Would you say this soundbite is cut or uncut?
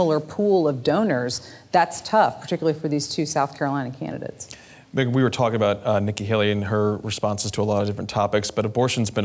uncut